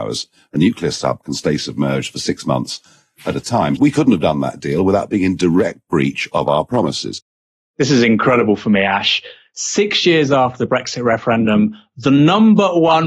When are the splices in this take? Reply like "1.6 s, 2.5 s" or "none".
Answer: 3.8 s